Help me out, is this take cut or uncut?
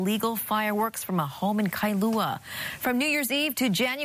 uncut